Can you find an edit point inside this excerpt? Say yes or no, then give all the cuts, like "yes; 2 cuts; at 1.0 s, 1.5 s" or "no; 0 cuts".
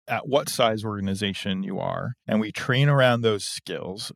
yes; 1 cut; at 2.2 s